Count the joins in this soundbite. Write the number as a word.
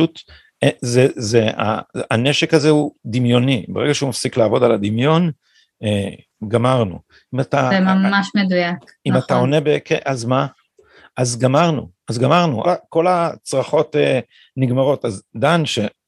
one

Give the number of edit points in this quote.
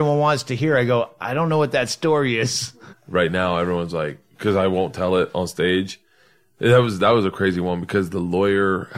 one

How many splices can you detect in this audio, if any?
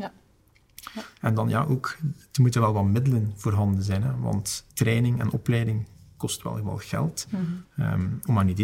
two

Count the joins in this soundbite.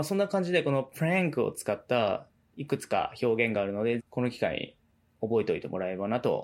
one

